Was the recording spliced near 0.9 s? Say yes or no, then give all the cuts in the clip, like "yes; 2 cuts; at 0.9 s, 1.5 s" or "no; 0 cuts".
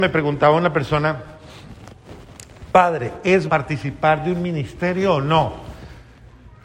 no; 1 cut; at 3.5 s